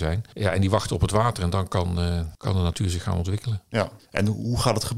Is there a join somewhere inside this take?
no; 0 cuts

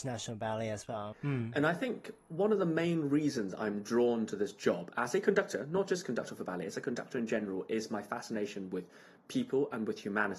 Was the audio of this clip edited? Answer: yes; 1 cut; at 1.1 s

